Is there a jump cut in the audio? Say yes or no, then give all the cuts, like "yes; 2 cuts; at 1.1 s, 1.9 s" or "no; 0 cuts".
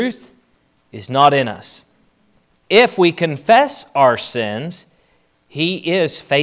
no; 0 cuts